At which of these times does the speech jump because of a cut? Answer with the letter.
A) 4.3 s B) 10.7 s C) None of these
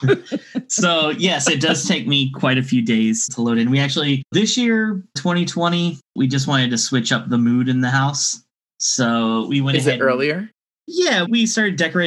C